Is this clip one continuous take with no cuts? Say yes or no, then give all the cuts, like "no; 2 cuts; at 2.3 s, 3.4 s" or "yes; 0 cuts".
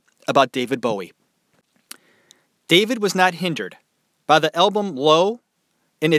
yes; 0 cuts